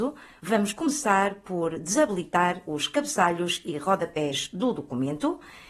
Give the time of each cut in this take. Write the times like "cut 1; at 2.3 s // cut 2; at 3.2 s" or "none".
none